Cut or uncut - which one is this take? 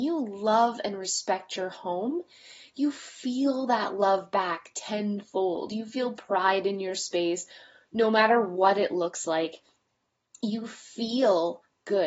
uncut